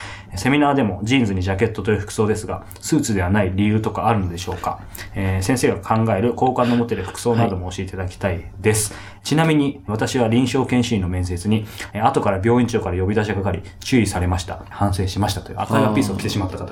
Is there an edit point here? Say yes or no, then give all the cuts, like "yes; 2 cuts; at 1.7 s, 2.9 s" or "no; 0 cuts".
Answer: yes; 2 cuts; at 11.9 s, 14.7 s